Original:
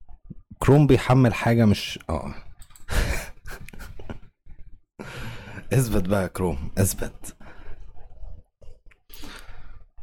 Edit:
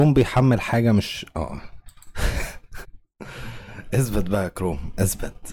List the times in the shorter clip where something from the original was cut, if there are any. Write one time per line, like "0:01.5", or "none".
0:02.8